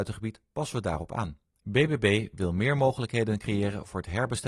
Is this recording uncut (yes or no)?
yes